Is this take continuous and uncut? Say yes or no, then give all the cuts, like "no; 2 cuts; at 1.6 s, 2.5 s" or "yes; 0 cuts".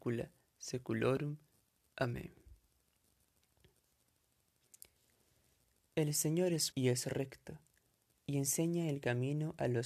no; 1 cut; at 6.7 s